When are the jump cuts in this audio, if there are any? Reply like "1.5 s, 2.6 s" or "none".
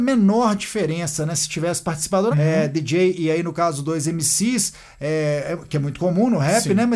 2.3 s